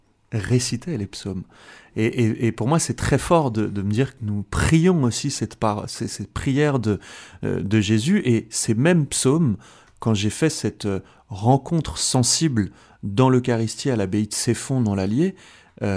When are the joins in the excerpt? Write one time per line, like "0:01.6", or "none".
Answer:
0:04.2